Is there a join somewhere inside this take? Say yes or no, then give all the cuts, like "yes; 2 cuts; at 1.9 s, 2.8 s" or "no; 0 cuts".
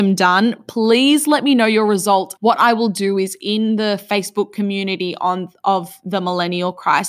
yes; 1 cut; at 2.4 s